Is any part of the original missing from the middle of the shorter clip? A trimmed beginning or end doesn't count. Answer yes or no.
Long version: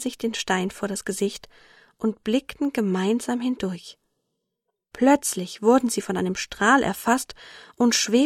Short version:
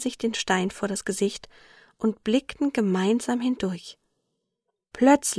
no